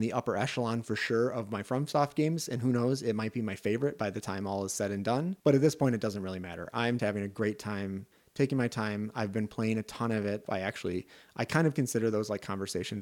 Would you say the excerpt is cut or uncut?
cut